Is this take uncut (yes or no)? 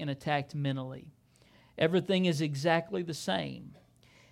yes